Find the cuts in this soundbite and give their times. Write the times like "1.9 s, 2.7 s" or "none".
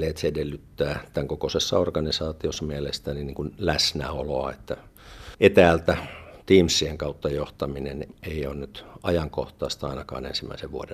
5.3 s, 8.1 s

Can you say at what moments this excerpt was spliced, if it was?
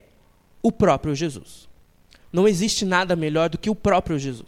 none

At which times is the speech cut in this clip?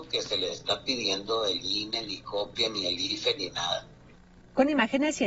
none

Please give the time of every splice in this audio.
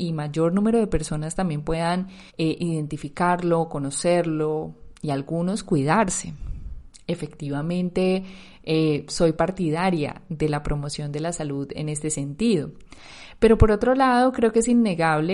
2.3 s

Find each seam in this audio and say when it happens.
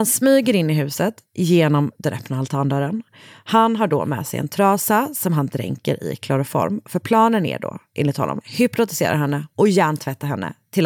8.4 s

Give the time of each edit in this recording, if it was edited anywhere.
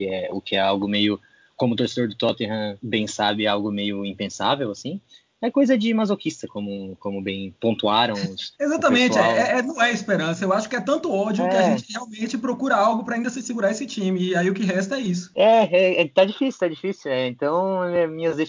none

